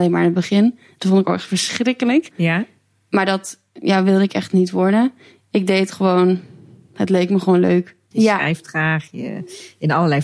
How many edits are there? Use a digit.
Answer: 2